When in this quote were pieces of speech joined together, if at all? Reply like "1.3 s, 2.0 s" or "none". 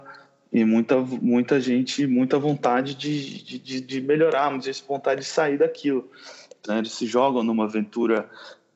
6.6 s